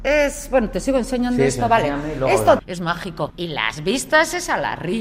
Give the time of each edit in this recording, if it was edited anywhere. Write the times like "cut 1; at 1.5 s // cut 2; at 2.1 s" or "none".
cut 1; at 2.6 s